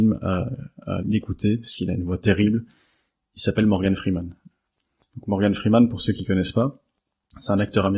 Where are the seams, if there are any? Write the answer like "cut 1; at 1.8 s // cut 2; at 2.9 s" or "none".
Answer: cut 1; at 1.0 s